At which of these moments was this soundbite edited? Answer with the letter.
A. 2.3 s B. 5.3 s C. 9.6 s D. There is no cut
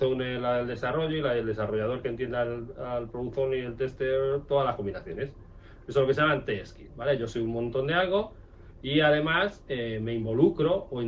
D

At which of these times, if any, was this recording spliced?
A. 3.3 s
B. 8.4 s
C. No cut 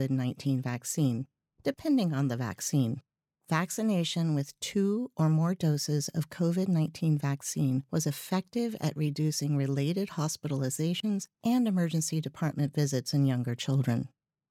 A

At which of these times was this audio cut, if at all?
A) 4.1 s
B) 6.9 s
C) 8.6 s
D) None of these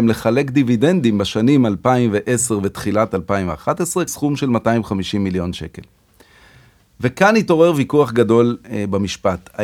A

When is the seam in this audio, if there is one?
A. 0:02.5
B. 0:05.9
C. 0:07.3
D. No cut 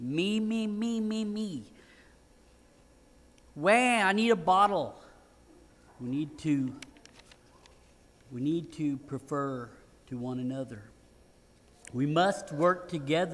B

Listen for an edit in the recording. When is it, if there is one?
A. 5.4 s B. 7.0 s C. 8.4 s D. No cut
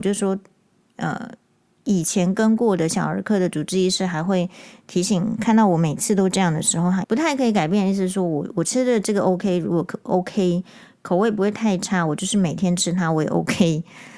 B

